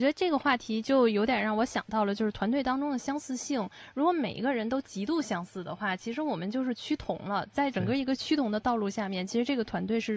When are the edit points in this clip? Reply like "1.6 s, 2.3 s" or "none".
none